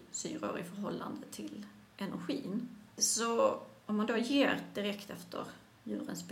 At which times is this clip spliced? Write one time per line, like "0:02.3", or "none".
none